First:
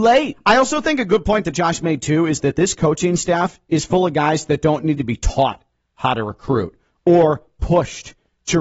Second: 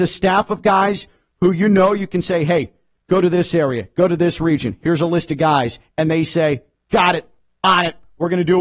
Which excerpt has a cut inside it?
second; 1 cut; at 2.9 s

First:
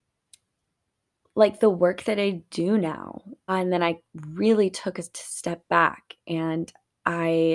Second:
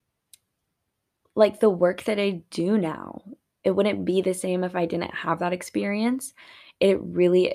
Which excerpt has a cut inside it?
first; 1 cut; at 3.5 s

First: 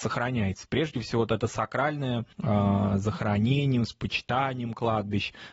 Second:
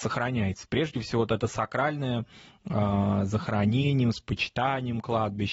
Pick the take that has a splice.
first; 1 cut; at 2.3 s

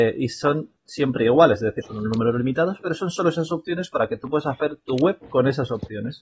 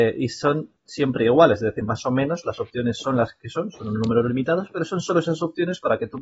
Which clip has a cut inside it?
first; 1 cut; at 1.8 s

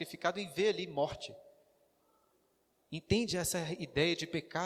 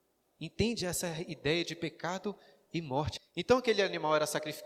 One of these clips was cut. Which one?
second; 1 cut; at 3.2 s

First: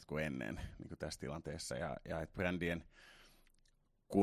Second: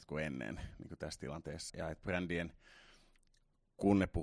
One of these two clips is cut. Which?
second; 1 cut; at 1.7 s

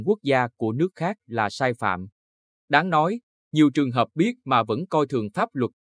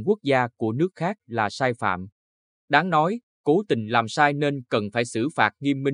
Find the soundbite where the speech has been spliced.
second; 1 cut; at 3.3 s

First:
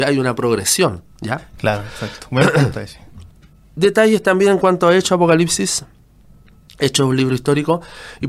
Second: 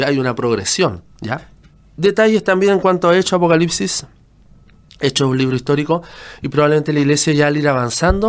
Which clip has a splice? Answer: second; 1 cut; at 1.5 s

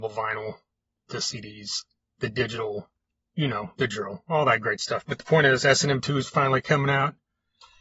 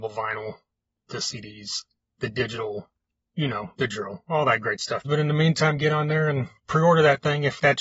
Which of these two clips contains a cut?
second; 2 cuts; at 5.0 s, 6.6 s

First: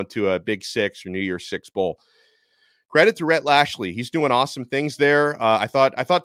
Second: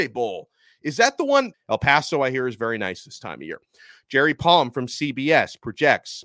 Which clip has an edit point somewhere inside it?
second; 1 cut; at 1.5 s

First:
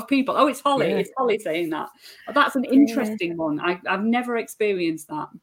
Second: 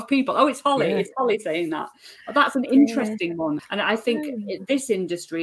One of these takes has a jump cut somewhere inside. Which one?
second; 1 cut; at 3.6 s

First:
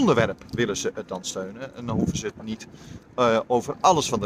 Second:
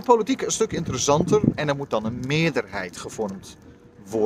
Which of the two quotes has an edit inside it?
second; 1 cut; at 1.5 s

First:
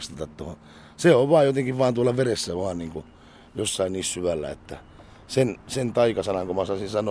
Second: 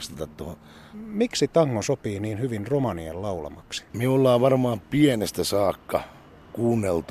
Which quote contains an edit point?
second; 2 cuts; at 0.9 s, 3.9 s

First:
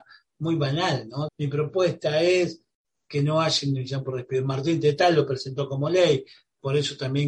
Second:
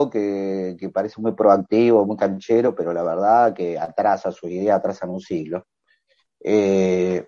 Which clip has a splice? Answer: first; 1 cut; at 1.3 s

